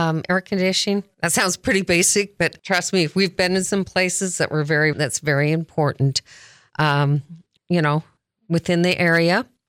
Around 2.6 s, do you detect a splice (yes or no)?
yes